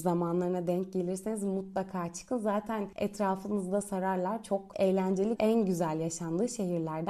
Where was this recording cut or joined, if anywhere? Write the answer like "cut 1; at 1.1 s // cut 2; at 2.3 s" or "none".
cut 1; at 5.4 s